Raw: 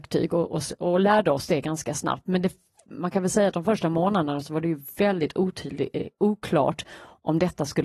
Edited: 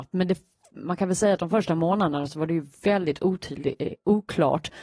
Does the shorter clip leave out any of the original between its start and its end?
no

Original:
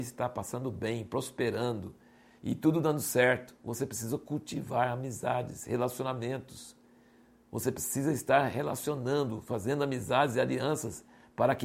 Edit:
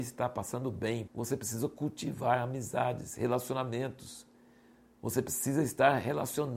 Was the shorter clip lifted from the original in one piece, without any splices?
no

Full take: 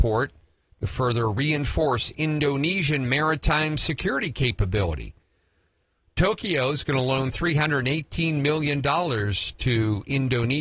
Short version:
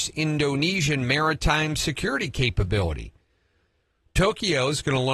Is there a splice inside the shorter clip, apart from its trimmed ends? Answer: no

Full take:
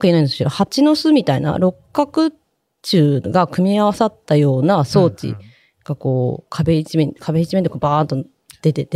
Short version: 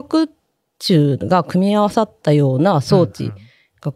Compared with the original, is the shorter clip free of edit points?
yes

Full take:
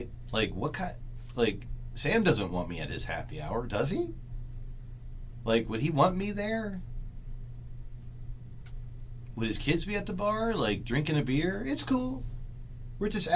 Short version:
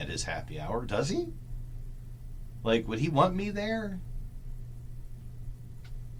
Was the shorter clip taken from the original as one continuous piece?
yes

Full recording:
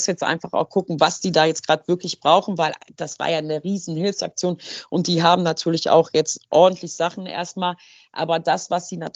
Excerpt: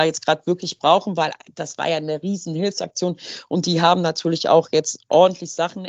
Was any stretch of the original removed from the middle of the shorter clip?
no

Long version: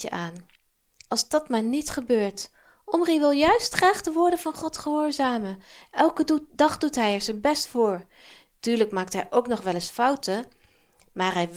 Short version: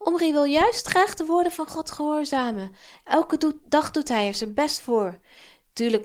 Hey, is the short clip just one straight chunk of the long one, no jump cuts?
yes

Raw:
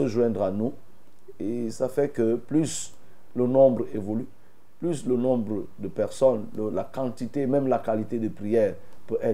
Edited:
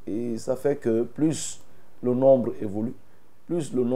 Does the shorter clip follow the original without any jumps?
yes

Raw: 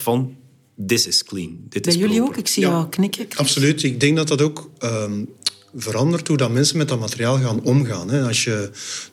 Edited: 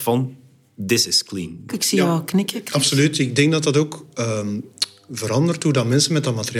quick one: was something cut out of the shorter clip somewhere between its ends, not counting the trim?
yes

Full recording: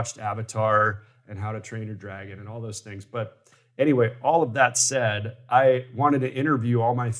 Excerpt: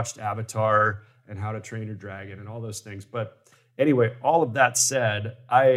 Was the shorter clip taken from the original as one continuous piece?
yes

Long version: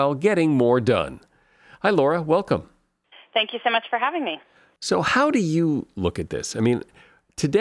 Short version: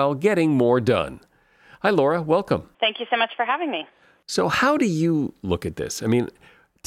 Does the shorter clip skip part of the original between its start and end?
yes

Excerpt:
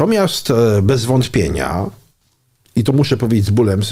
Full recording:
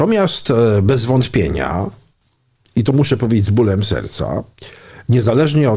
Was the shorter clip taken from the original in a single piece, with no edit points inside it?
yes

